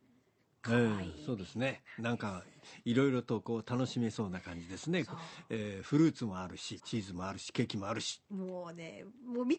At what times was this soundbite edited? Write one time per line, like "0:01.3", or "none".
0:06.8
0:08.3